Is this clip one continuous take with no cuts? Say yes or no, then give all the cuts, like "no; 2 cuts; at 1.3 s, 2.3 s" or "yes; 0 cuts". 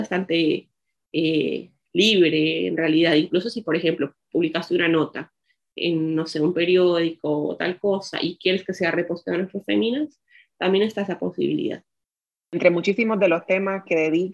yes; 0 cuts